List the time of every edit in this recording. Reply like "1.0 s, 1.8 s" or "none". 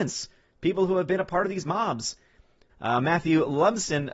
2.7 s